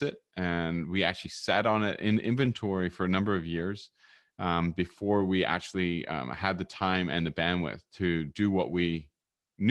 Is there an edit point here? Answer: no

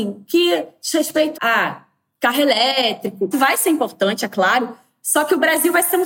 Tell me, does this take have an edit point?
yes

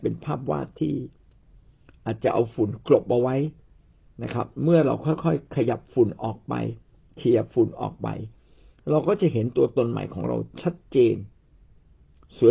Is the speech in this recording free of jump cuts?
yes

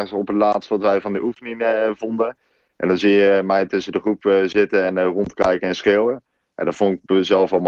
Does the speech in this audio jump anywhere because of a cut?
no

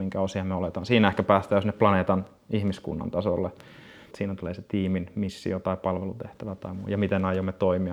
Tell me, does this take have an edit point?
yes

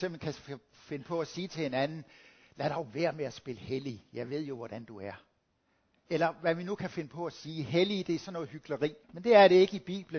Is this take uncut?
no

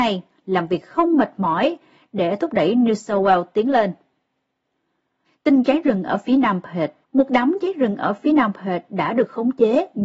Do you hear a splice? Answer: yes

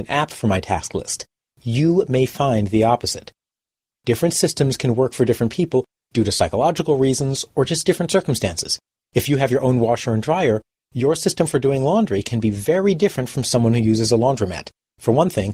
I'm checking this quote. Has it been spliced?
no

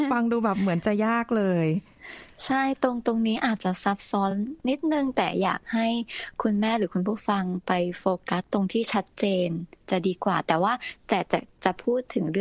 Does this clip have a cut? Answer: no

